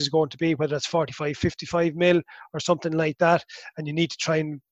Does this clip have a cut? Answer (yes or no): no